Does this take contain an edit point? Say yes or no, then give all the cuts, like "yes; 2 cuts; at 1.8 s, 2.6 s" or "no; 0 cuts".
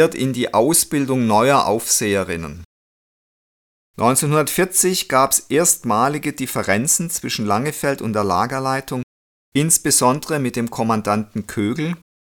no; 0 cuts